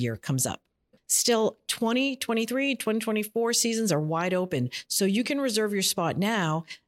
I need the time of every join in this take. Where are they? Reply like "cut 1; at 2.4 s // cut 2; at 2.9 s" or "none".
cut 1; at 1.0 s